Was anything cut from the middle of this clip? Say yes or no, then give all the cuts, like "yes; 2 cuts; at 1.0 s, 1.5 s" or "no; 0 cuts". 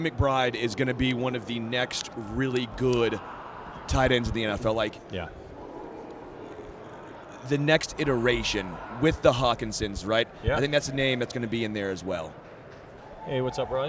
yes; 1 cut; at 10.0 s